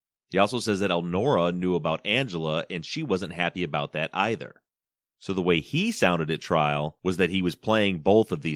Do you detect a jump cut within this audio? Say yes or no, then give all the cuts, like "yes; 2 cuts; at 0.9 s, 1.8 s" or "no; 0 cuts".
no; 0 cuts